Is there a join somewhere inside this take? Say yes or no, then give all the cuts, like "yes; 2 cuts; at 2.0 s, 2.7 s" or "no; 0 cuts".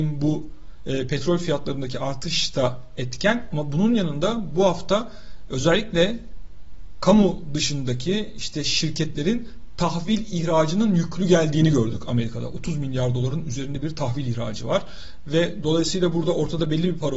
no; 0 cuts